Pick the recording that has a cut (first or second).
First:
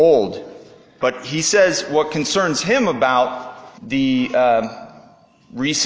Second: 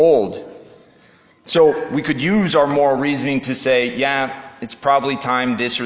first